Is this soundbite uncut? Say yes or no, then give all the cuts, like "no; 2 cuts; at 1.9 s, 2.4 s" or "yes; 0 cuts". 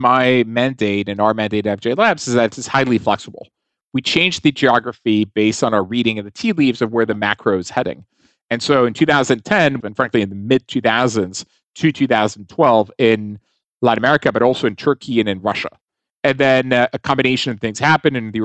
no; 1 cut; at 9.8 s